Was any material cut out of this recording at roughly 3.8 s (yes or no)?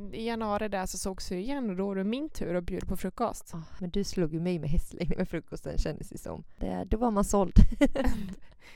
yes